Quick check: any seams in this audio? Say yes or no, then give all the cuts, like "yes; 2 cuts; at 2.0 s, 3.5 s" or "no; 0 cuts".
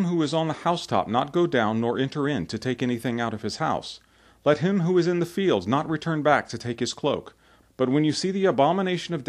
yes; 1 cut; at 7.6 s